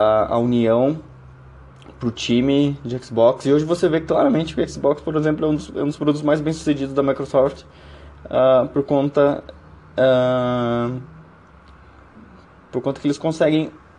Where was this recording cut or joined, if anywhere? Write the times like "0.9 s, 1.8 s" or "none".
none